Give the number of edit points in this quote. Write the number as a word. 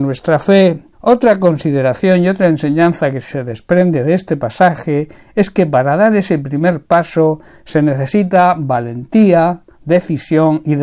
one